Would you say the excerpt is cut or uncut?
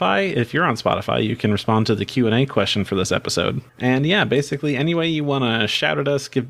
cut